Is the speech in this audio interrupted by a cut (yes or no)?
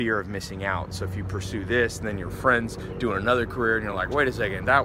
no